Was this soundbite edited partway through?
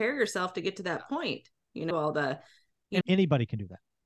yes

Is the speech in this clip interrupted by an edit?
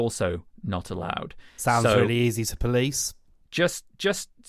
no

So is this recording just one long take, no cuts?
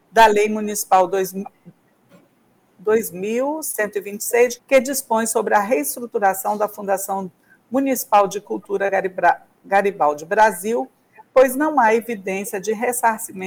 no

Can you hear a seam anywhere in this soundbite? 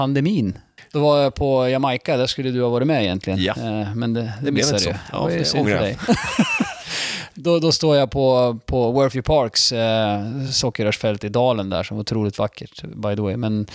no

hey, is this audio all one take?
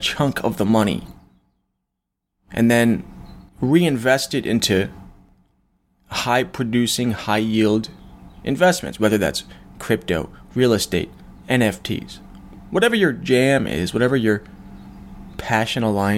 no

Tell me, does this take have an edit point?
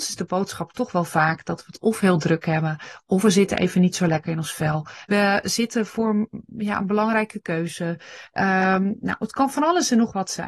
yes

